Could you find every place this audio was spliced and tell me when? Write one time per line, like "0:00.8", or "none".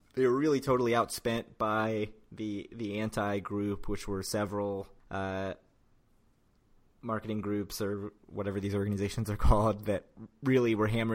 0:05.0